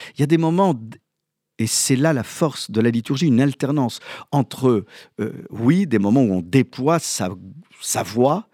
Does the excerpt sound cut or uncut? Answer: uncut